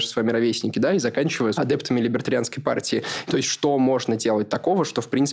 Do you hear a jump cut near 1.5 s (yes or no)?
yes